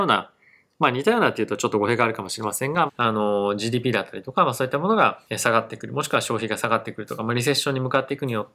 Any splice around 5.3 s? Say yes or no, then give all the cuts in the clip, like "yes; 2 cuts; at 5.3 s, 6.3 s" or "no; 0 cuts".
yes; 2 cuts; at 2.9 s, 5.3 s